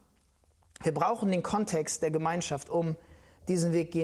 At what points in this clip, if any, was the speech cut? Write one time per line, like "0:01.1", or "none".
none